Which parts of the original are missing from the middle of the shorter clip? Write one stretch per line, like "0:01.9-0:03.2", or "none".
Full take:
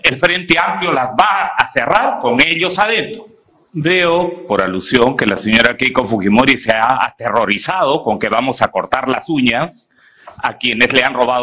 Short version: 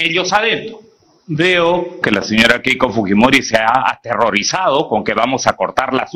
0:04.5-0:05.2

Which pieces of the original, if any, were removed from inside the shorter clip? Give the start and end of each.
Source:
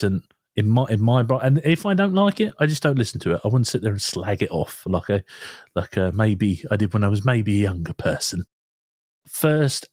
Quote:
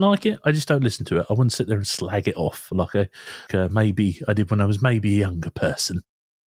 0:05.6-0:05.9

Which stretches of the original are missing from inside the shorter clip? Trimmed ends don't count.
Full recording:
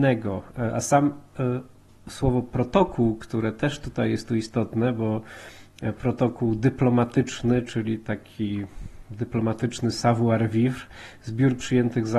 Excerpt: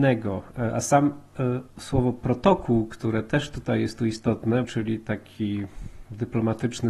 0:01.7-0:02.0
0:04.9-0:07.6

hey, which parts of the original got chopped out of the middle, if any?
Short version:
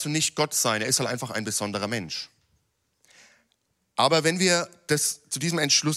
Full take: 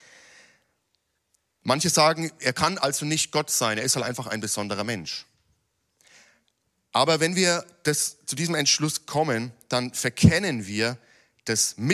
none

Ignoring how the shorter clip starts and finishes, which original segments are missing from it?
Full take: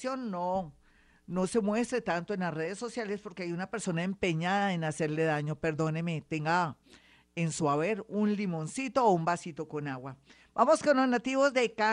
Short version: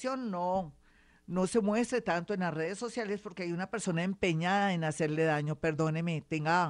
none

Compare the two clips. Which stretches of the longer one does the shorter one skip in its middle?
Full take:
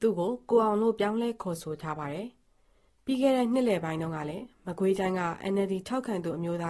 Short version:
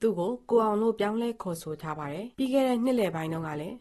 0:02.3-0:03.0

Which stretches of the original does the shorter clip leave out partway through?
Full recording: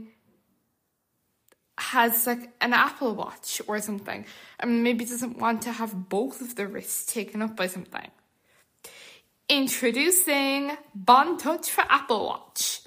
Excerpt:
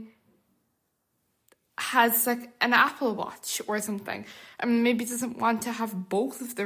none

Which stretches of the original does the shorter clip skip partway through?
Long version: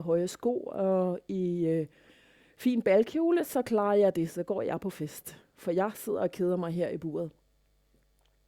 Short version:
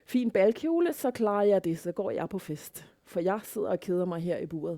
none

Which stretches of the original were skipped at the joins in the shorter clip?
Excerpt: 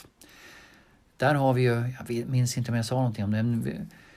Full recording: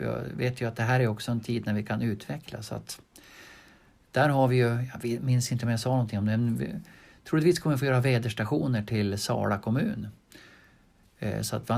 none

